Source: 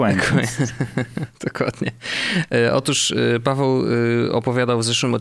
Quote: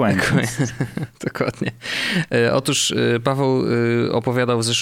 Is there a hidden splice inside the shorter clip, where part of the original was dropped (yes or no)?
yes